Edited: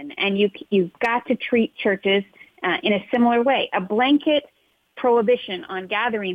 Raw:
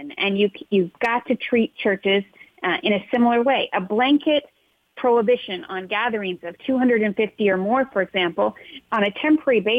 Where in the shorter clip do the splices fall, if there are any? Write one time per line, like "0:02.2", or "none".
none